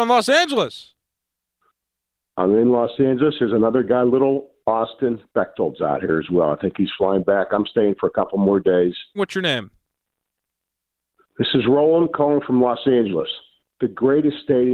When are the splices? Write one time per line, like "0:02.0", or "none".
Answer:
0:09.2
0:13.8